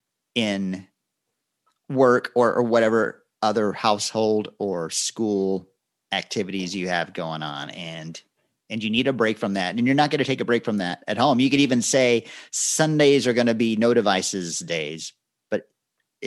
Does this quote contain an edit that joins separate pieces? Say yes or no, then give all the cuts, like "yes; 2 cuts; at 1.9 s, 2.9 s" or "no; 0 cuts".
no; 0 cuts